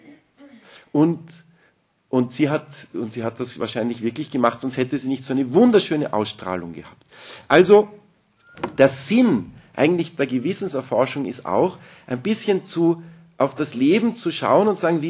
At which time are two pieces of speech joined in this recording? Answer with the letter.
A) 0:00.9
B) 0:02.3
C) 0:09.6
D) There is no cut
D